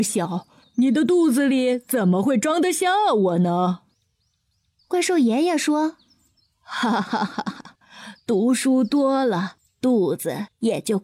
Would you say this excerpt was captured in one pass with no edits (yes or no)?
yes